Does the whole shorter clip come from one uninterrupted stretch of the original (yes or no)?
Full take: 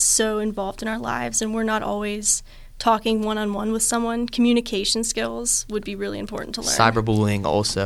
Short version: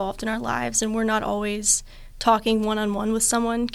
yes